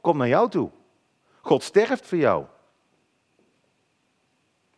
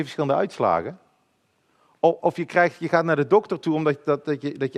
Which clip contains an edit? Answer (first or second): second